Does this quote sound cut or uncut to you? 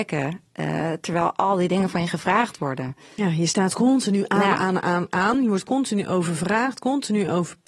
uncut